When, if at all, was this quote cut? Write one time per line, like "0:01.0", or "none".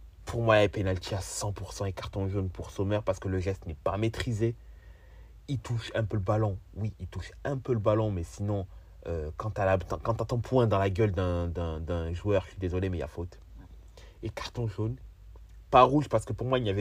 none